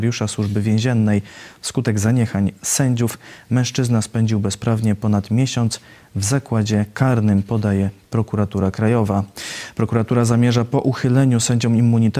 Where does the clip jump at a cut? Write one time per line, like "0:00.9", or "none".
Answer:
none